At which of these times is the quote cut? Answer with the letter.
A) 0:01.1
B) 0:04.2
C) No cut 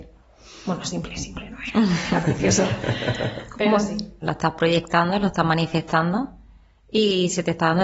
B